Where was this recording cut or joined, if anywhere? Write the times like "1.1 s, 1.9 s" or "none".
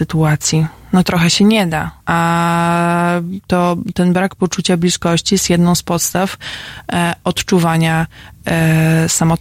2.0 s